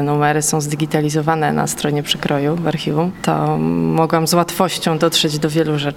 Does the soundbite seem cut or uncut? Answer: uncut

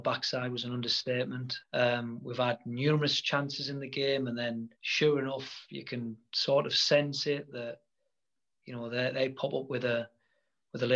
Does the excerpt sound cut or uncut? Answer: cut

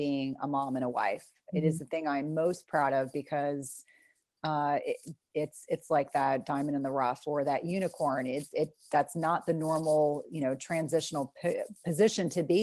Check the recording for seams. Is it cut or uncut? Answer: uncut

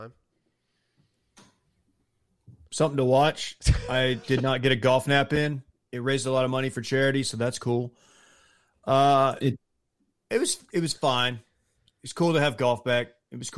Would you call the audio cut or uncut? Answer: cut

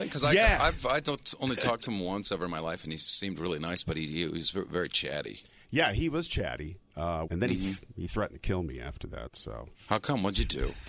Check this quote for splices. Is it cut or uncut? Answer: cut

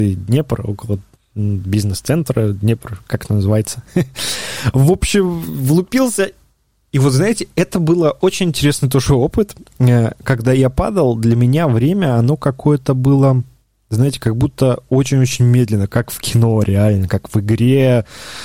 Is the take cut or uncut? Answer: uncut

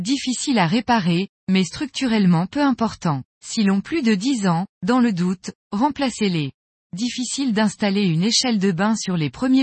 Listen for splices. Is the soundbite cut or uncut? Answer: cut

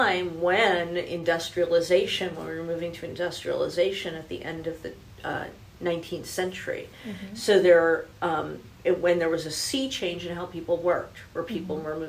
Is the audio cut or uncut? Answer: uncut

